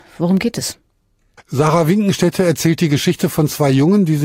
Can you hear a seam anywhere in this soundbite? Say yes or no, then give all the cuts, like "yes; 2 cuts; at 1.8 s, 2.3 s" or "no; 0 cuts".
yes; 1 cut; at 1.4 s